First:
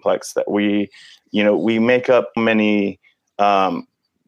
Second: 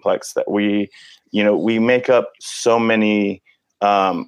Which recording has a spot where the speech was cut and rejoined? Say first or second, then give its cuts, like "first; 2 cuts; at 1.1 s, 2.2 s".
first; 1 cut; at 2.4 s